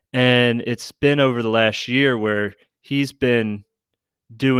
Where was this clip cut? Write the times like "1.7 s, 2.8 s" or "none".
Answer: none